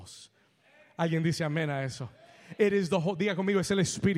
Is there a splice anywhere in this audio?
no; 0 cuts

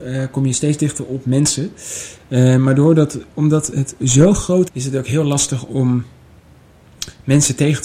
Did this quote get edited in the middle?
yes; 1 cut; at 4.7 s

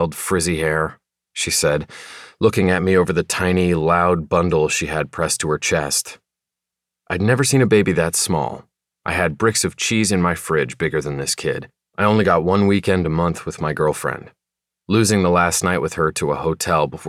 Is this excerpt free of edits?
no; 2 cuts; at 1.3 s, 11.9 s

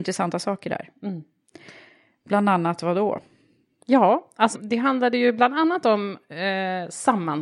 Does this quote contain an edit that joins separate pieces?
yes; 1 cut; at 4.5 s

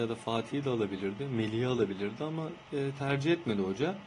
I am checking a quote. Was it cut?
no; 0 cuts

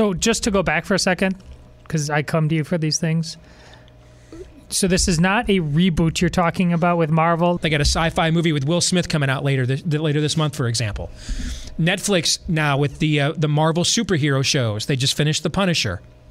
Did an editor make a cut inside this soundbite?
yes; 1 cut; at 7.6 s

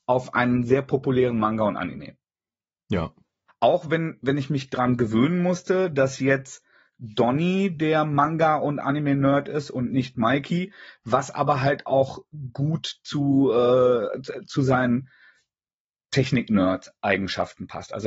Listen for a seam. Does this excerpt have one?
yes; 1 cut; at 3.5 s

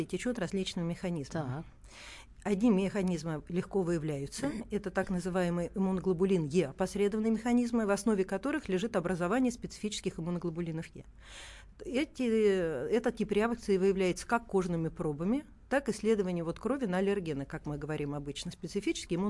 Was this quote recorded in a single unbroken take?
yes; 0 cuts

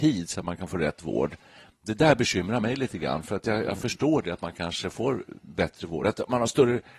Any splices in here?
no; 0 cuts

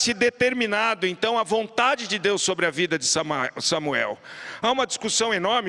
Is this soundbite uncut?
yes; 0 cuts

